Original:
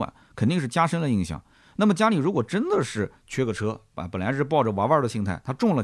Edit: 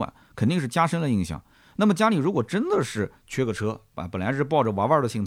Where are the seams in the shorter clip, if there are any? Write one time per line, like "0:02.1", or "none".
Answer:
none

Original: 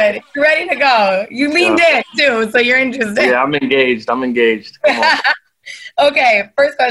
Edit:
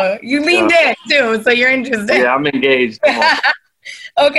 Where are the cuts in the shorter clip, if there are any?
0:03.0

